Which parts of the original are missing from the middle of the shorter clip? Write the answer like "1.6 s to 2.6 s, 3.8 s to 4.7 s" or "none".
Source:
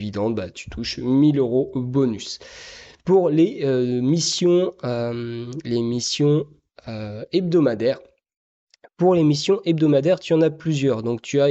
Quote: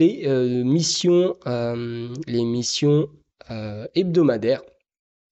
none